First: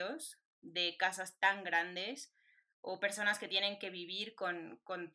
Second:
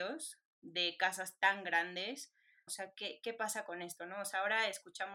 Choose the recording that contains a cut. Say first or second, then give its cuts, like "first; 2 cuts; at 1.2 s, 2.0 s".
second; 1 cut; at 2.7 s